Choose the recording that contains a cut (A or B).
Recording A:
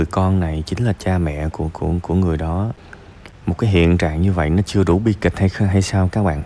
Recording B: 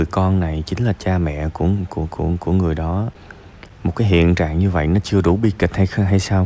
A